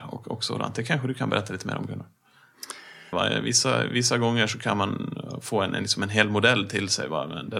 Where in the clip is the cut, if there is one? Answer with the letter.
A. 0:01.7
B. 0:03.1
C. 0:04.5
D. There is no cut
B